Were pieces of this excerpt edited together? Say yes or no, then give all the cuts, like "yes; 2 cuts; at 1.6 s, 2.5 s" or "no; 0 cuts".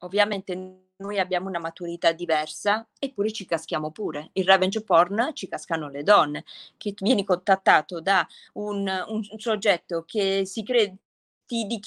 no; 0 cuts